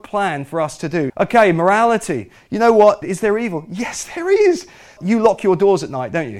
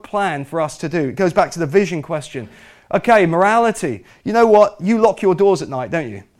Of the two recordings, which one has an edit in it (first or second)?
first